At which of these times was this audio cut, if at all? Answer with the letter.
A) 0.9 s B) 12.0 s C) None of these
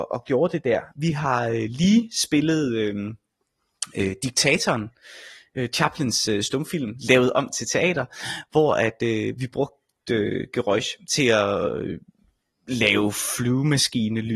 A